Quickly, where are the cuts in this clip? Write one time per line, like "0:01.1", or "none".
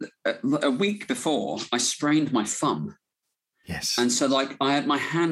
none